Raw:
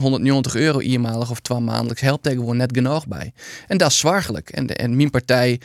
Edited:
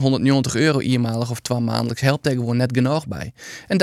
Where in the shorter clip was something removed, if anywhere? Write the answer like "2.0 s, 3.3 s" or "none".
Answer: none